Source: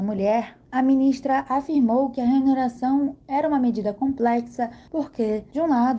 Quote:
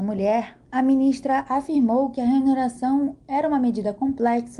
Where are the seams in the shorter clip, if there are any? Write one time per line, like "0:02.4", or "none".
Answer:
none